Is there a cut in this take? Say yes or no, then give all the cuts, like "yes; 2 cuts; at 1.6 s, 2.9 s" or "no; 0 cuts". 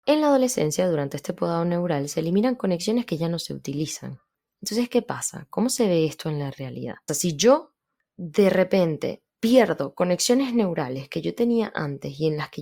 yes; 1 cut; at 7.1 s